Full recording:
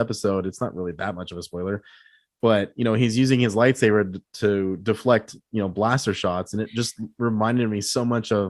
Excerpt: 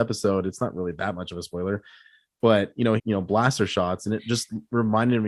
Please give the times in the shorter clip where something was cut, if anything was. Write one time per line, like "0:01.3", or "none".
0:03.0